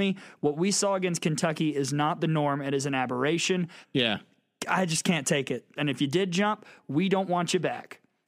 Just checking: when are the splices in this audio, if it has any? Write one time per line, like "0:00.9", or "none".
0:03.8
0:05.8